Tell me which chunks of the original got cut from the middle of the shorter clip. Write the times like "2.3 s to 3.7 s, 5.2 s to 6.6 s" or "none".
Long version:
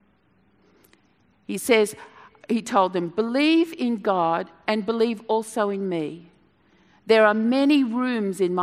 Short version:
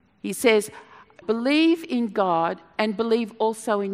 2.5 s to 3.1 s